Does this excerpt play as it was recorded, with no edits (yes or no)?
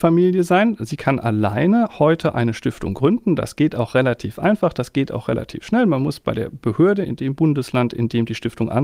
yes